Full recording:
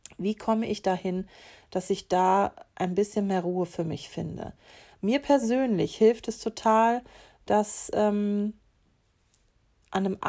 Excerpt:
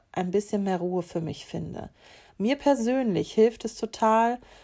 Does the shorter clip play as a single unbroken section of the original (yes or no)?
yes